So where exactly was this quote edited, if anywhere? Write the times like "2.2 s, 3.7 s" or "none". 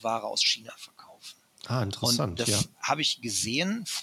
1.6 s

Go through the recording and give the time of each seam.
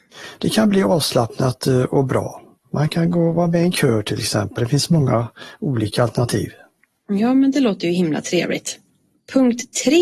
4.6 s

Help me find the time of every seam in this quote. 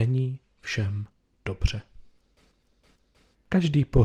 none

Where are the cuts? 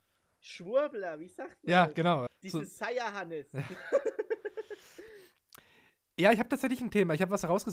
2.3 s

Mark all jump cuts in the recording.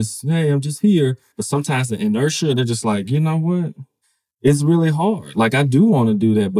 1.3 s

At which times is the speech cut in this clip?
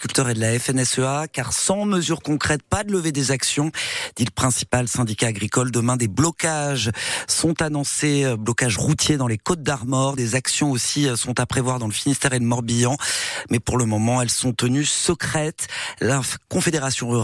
none

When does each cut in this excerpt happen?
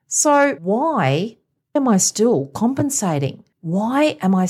3.5 s

